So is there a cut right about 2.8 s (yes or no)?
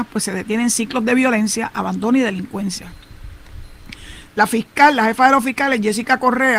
no